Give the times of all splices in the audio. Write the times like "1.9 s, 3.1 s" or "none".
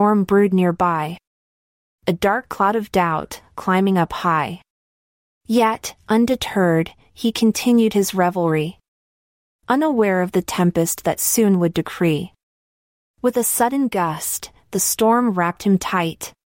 none